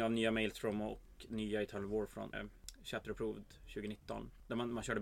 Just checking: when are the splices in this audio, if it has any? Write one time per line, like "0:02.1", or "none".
0:02.3